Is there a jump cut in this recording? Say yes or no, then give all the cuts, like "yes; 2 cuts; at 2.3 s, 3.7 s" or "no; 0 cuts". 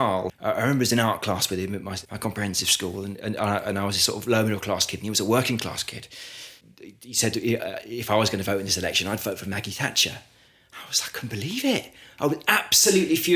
no; 0 cuts